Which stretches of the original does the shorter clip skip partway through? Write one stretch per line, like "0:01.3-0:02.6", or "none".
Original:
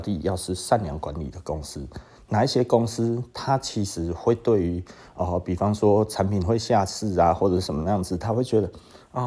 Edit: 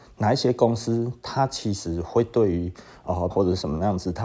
0:05.4-0:07.4